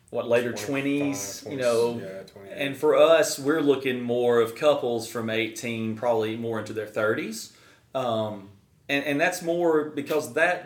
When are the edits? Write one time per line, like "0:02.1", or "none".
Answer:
none

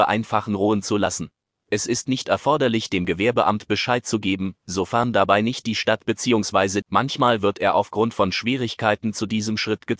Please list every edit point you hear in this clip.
0:06.8

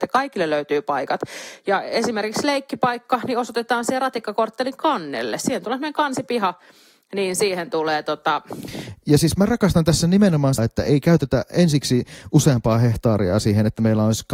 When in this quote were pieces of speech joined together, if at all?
0:10.6

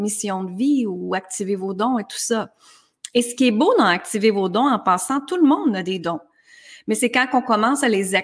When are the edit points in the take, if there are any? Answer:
none

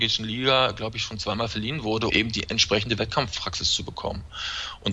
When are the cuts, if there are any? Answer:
0:02.1

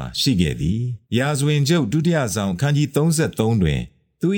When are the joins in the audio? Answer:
0:01.1

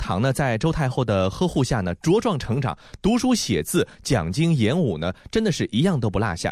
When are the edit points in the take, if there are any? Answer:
none

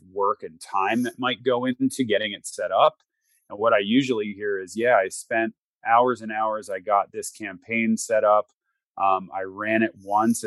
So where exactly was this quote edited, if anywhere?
none

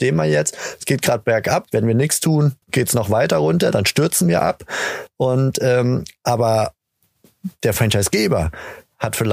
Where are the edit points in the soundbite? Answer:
0:02.6

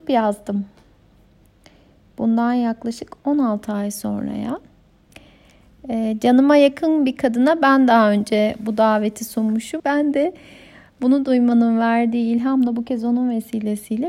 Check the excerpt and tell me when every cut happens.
0:09.8

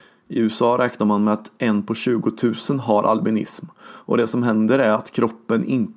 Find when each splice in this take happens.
none

